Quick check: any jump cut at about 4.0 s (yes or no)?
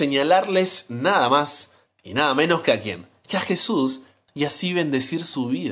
no